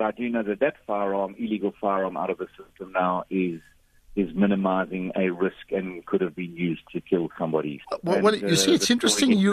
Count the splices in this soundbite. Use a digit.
1